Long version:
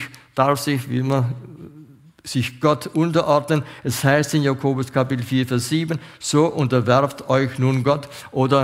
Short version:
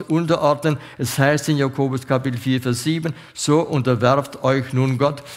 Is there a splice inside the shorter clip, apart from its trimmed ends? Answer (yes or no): no